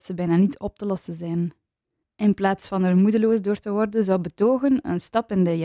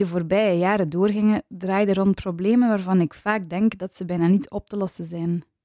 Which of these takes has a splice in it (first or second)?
first